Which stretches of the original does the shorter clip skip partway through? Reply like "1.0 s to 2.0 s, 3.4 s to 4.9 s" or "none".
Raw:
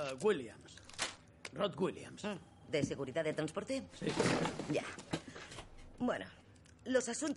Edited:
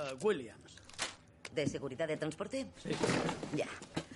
1.5 s to 2.7 s